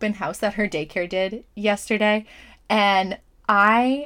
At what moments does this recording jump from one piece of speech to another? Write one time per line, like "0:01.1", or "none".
none